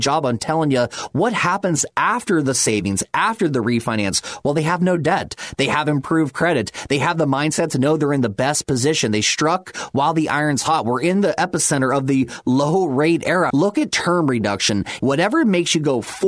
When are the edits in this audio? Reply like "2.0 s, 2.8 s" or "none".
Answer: 13.5 s, 15.0 s